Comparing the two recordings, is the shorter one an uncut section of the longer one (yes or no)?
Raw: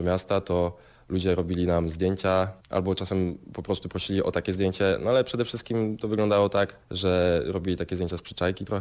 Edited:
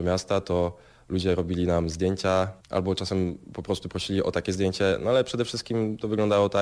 yes